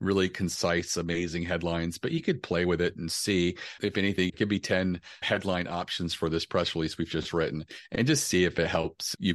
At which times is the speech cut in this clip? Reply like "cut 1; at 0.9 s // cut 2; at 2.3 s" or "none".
cut 1; at 4.3 s